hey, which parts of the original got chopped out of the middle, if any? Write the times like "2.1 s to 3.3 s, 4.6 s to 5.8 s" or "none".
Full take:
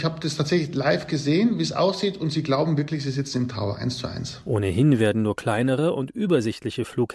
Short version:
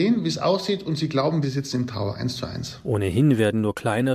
2.8 s to 3.0 s